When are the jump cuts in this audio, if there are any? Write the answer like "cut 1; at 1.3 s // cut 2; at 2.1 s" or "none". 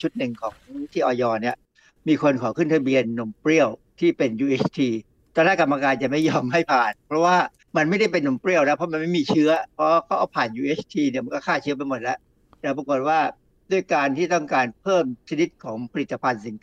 none